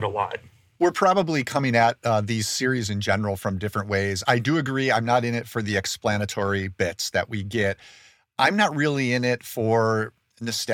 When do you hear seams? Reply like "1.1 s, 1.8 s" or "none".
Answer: none